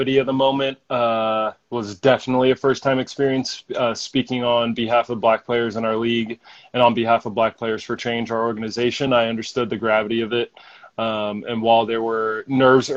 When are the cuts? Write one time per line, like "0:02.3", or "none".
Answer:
none